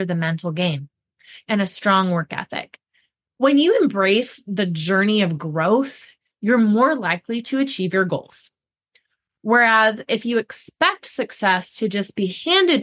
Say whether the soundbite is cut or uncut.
cut